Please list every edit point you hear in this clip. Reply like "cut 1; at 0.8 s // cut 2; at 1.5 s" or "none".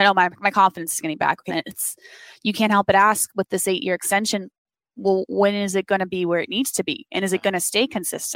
cut 1; at 1.5 s